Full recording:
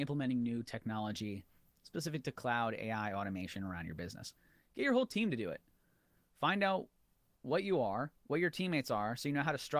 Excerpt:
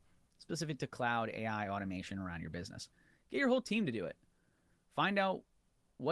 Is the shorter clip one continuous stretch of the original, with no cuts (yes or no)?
yes